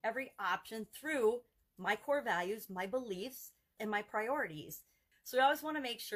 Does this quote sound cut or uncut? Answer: cut